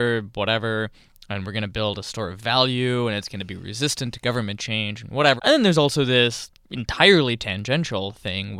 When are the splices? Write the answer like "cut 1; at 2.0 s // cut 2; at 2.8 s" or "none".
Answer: cut 1; at 5.4 s // cut 2; at 6.6 s